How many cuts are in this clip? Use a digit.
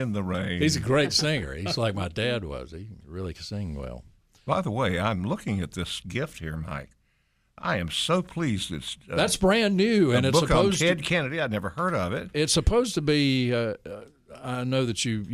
0